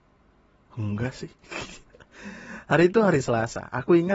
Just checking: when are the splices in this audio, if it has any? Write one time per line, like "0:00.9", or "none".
none